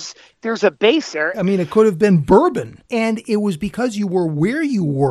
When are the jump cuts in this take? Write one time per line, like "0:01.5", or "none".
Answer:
0:01.3
0:02.9